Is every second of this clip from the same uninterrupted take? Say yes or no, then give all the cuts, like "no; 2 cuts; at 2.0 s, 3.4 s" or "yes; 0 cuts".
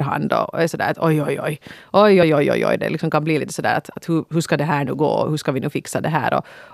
yes; 0 cuts